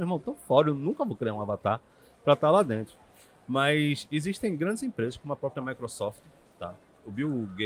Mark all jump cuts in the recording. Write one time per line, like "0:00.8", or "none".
none